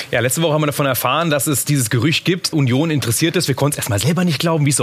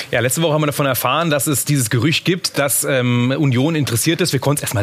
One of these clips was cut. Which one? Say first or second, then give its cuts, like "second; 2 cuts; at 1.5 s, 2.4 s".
first; 1 cut; at 2.5 s